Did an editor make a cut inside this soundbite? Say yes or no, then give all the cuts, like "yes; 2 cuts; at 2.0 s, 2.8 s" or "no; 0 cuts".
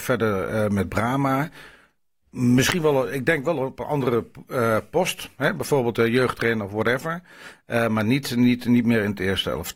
no; 0 cuts